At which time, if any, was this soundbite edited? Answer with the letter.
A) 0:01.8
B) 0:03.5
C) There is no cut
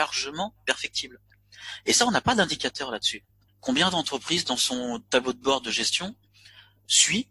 B